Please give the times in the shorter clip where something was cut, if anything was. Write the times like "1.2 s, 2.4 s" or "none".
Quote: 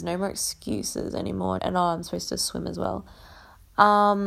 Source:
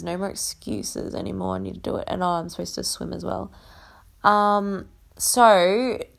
1.6 s

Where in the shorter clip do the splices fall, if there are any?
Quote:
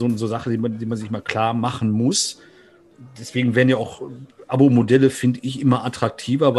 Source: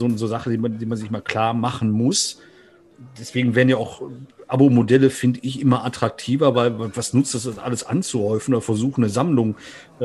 none

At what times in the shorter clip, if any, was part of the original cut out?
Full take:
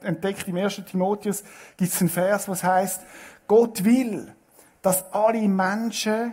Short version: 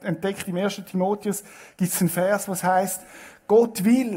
none

